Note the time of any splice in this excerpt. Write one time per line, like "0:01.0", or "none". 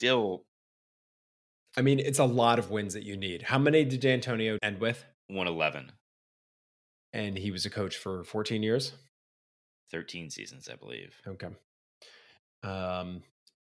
0:04.6